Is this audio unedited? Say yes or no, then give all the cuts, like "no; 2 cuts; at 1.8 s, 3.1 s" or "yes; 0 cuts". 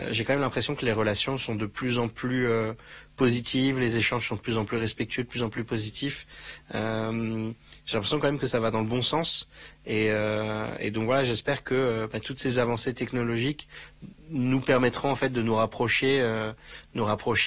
yes; 0 cuts